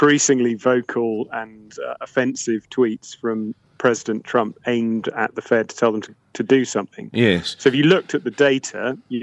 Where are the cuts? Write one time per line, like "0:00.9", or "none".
none

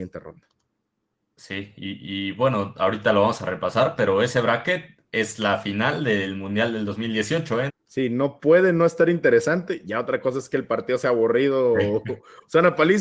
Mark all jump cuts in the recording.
0:07.7

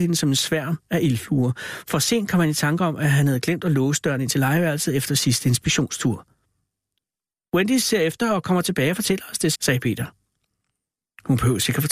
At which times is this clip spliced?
0:09.5

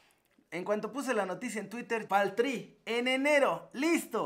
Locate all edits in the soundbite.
0:02.1

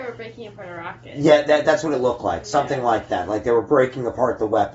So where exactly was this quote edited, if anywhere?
none

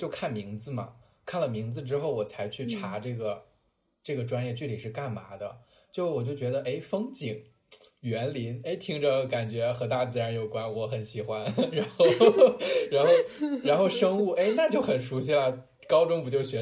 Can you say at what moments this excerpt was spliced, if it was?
none

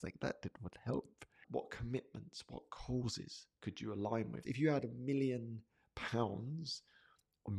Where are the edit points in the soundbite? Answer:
0:01.4
0:04.4

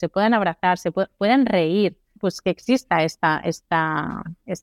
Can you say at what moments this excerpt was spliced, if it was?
0:02.2

